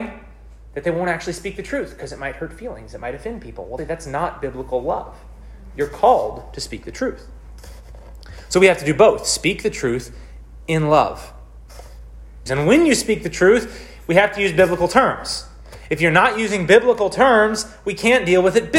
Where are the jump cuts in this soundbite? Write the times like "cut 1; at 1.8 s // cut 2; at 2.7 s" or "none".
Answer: cut 1; at 3.8 s // cut 2; at 12.5 s